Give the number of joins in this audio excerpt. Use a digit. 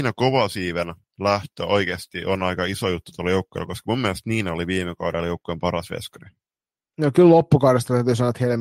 0